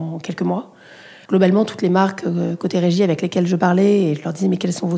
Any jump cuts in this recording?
yes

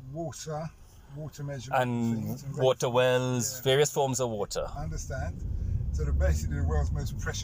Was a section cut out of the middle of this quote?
no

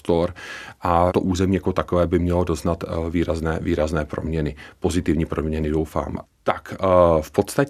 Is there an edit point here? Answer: yes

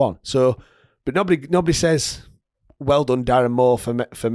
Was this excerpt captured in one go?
yes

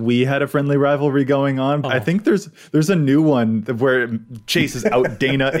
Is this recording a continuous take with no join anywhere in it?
no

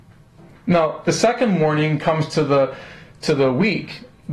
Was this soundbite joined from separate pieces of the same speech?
no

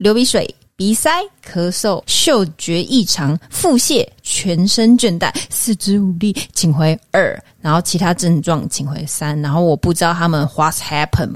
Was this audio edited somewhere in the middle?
yes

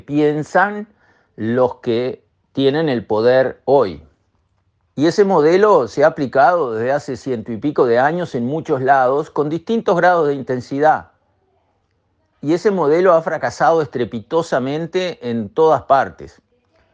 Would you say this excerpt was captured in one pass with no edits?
no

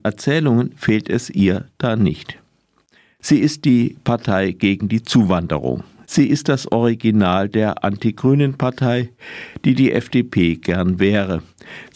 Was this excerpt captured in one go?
no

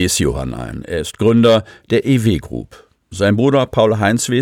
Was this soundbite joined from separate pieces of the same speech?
yes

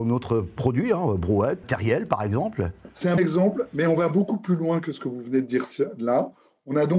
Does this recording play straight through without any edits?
no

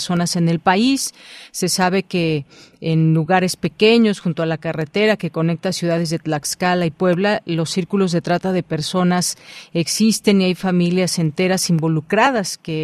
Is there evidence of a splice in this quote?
no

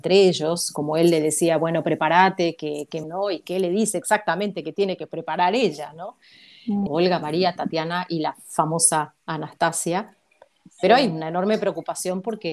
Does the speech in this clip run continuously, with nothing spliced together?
no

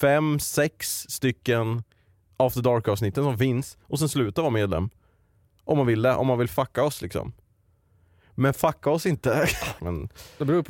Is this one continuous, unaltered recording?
no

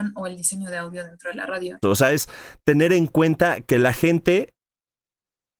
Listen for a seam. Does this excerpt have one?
yes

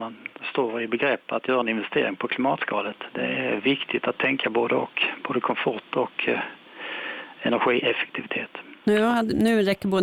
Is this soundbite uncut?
yes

